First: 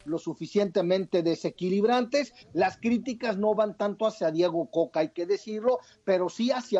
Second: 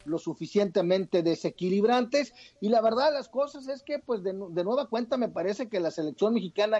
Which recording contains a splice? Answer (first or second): first